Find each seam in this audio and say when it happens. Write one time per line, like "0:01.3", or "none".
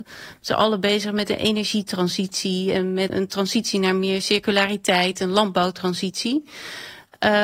0:03.1